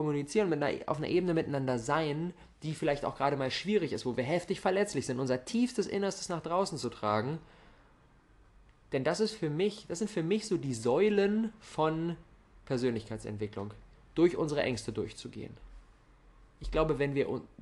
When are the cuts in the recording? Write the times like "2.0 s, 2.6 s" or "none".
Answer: none